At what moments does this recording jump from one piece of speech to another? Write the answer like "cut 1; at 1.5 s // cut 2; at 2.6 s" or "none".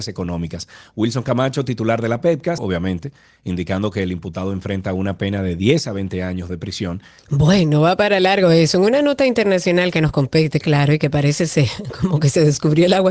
cut 1; at 2.6 s // cut 2; at 7.2 s